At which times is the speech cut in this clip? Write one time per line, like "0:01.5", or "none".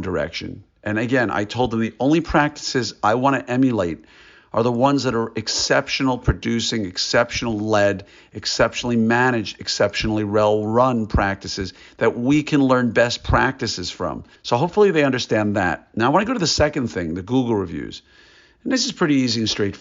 0:14.4